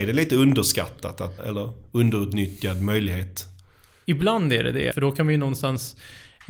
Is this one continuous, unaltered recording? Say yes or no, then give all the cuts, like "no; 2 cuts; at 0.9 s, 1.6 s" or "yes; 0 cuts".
no; 2 cuts; at 1.4 s, 4.9 s